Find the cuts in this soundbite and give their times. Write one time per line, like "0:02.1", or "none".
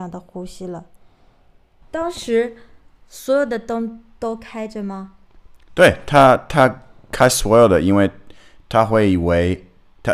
0:01.8